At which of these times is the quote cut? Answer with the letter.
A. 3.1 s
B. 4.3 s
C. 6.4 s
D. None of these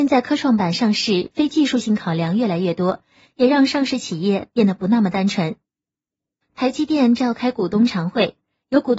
C